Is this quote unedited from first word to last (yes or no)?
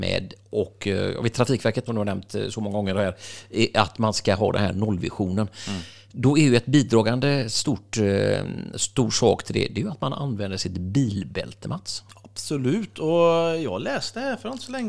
no